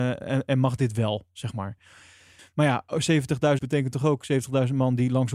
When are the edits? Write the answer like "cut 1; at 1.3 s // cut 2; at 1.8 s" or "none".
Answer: cut 1; at 2.4 s // cut 2; at 3.6 s